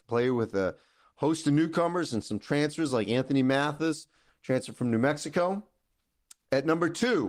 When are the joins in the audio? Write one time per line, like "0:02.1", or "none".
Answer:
none